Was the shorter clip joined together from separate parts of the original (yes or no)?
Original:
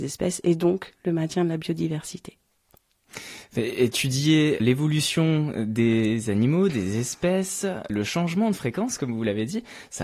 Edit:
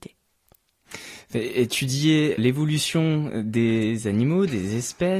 no